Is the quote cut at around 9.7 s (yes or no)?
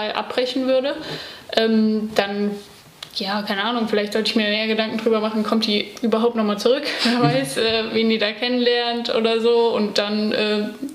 no